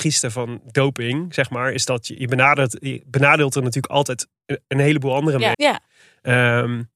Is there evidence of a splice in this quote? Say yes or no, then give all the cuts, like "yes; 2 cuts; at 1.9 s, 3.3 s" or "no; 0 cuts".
yes; 1 cut; at 5.5 s